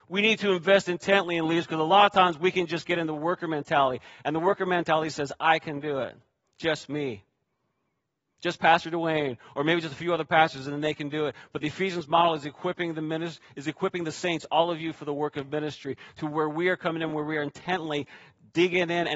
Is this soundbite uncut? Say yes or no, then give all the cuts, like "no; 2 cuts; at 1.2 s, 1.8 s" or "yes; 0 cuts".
yes; 0 cuts